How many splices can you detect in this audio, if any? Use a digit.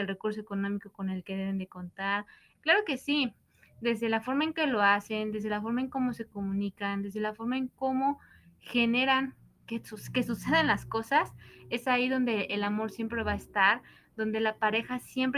1